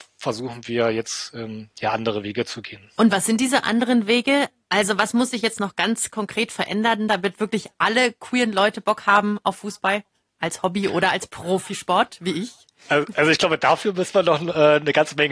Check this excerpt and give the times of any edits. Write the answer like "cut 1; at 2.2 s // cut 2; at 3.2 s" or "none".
cut 1; at 3.0 s